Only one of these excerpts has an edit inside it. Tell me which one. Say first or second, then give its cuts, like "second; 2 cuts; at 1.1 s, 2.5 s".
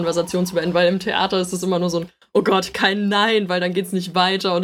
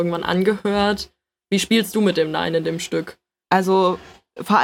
second; 1 cut; at 3.4 s